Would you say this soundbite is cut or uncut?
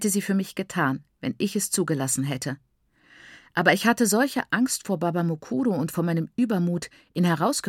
uncut